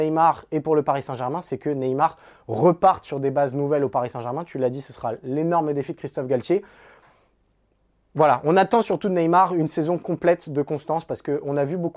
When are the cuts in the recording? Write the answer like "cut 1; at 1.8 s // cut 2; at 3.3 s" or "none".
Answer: none